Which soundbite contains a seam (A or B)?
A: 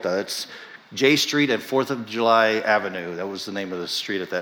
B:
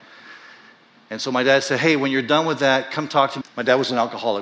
B